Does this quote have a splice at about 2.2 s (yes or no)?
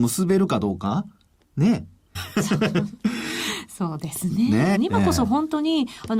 yes